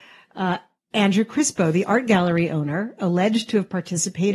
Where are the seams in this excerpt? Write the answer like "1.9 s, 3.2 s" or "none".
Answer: none